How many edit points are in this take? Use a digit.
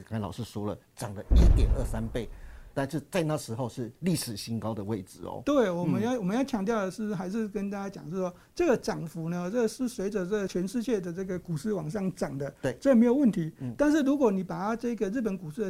1